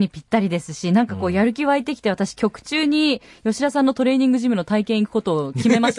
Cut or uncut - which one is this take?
uncut